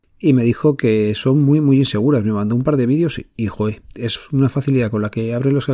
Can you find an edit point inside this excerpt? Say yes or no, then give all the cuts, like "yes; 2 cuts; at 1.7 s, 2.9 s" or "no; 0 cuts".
no; 0 cuts